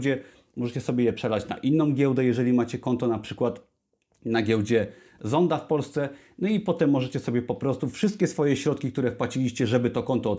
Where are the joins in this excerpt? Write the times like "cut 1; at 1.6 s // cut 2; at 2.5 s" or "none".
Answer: none